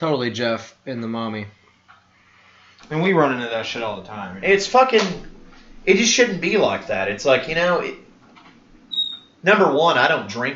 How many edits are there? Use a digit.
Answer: 1